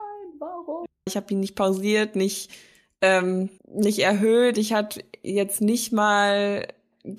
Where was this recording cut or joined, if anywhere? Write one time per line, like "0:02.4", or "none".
0:01.1
0:03.6